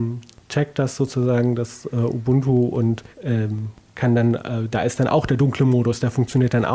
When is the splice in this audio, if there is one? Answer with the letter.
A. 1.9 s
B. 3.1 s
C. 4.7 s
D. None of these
B